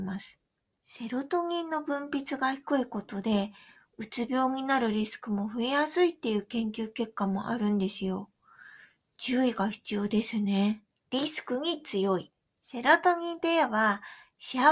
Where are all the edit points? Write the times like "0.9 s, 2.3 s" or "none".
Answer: 10.9 s, 12.5 s